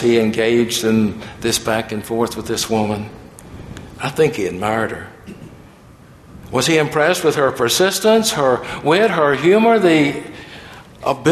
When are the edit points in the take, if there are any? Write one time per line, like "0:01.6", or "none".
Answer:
none